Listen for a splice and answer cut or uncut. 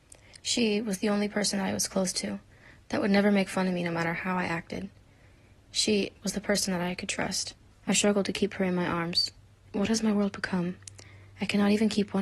cut